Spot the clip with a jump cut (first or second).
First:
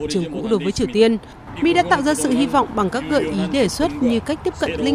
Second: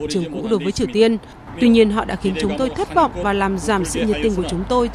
second